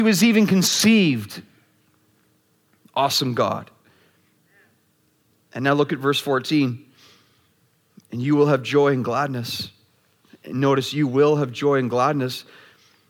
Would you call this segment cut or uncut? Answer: uncut